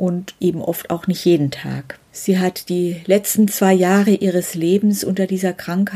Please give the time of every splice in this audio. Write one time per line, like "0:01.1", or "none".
0:02.1